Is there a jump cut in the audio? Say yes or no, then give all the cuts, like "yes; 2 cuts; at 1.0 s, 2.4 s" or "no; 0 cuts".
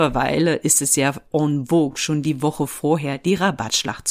no; 0 cuts